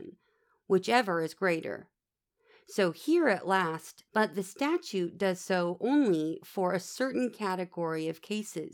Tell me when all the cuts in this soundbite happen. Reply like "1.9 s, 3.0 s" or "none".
4.1 s